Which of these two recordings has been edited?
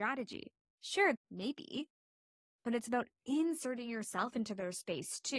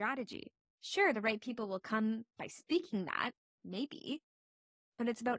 first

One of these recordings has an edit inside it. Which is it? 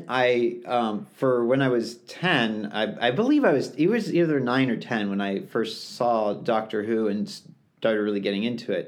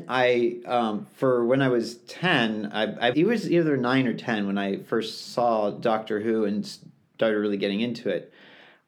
second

